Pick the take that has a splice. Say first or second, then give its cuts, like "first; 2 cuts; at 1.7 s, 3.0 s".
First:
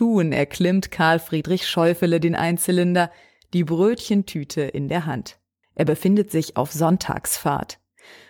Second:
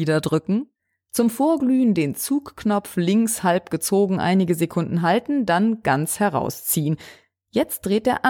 first; 1 cut; at 5.6 s